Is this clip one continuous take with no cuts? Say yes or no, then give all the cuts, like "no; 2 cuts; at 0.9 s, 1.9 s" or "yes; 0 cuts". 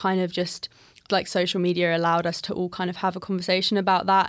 no; 1 cut; at 1.1 s